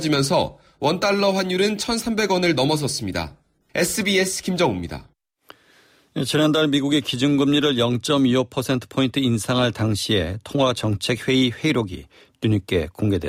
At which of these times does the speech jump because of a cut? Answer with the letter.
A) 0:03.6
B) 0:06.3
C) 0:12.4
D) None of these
A